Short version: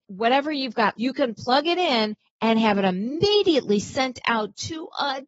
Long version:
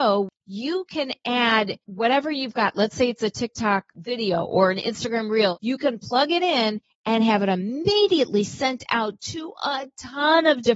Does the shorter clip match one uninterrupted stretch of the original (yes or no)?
no